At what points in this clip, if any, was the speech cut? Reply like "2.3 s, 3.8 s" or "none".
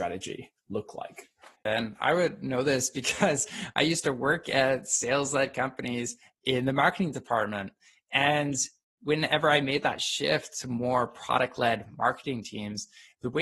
1.7 s